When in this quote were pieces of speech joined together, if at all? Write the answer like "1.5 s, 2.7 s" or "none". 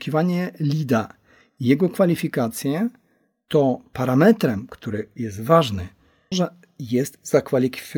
6.3 s